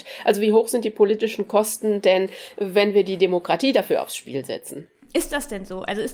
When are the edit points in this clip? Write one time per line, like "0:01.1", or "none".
none